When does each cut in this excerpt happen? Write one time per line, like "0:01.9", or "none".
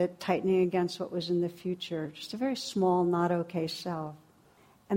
none